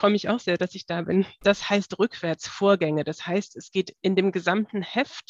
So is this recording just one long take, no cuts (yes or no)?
no